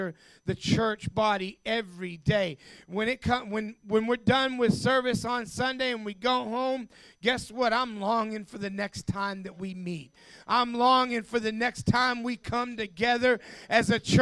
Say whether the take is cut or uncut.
uncut